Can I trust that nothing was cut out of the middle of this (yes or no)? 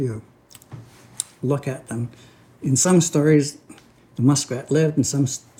yes